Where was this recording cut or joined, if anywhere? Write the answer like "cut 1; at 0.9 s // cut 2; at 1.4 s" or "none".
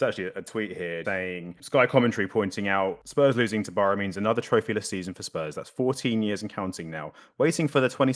cut 1; at 1.0 s